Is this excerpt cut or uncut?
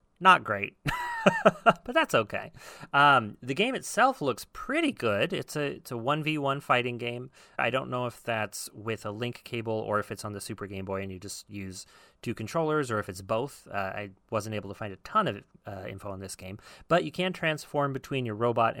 cut